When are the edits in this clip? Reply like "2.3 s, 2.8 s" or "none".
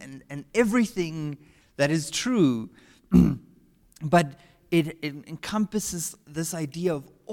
1.6 s